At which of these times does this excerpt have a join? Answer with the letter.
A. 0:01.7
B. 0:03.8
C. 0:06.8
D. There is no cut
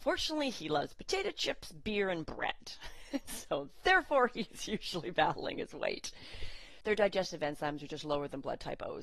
C